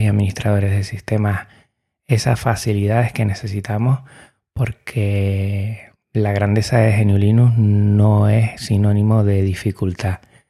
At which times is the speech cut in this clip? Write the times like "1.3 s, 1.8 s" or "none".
6.0 s